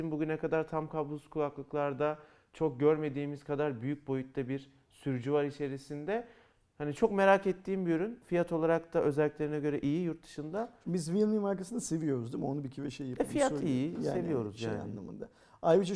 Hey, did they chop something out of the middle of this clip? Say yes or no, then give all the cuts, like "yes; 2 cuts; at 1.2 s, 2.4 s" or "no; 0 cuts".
no; 0 cuts